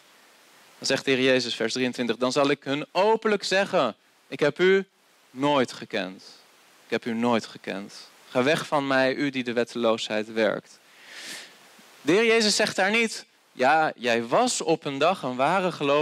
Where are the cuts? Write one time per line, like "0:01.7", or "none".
none